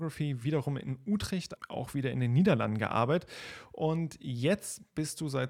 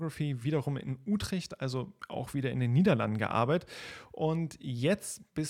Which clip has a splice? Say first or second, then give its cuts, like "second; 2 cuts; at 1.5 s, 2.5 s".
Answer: first; 1 cut; at 1.6 s